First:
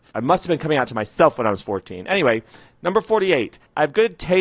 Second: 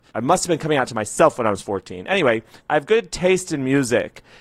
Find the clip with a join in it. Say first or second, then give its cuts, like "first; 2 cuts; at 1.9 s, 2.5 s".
second; 1 cut; at 2.6 s